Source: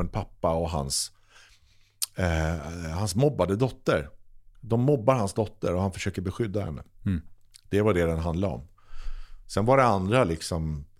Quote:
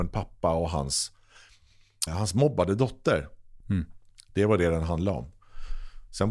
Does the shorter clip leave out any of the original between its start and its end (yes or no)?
yes